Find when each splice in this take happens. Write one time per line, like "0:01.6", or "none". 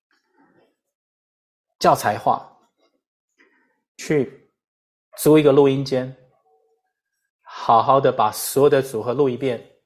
none